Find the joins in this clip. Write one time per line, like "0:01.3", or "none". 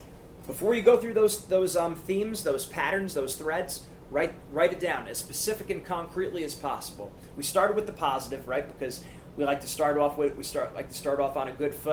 none